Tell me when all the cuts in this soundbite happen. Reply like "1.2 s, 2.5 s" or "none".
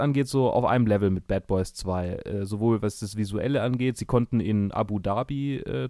none